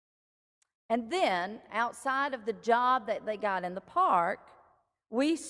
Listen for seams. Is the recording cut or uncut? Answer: uncut